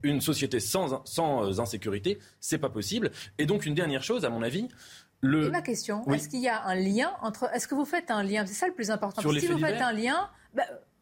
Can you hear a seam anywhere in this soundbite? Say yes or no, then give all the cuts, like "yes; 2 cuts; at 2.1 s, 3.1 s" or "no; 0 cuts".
no; 0 cuts